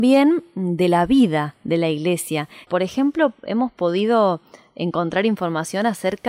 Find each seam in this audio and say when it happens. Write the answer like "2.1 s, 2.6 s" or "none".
2.6 s